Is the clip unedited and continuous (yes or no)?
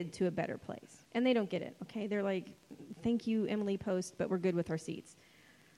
no